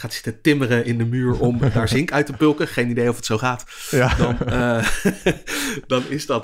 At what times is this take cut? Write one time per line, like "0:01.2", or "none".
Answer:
none